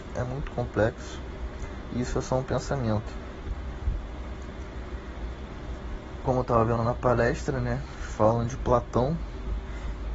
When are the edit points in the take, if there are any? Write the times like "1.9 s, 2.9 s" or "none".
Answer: none